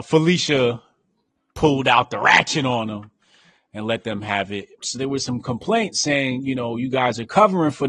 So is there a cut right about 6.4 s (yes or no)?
no